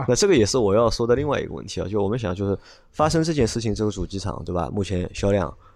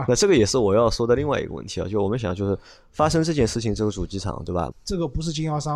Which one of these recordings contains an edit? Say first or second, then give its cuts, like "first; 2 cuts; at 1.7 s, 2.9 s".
second; 1 cut; at 4.7 s